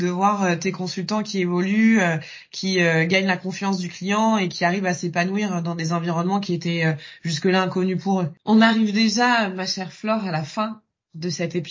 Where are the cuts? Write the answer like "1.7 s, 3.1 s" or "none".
8.4 s